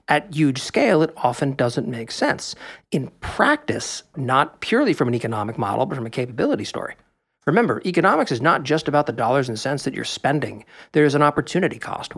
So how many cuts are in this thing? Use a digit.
1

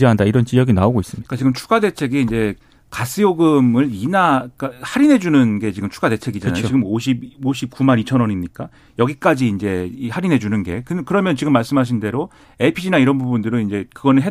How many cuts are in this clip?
0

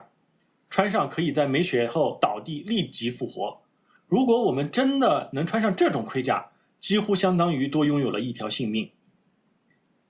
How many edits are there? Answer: 0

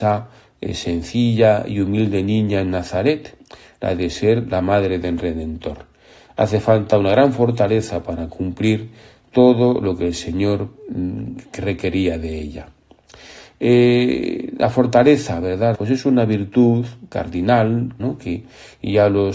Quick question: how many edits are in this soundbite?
2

